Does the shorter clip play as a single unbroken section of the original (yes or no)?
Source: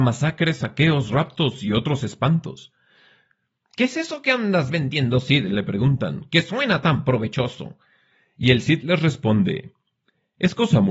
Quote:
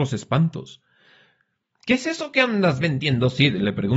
yes